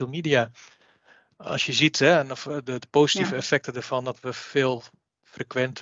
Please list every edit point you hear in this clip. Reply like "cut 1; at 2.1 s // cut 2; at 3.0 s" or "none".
none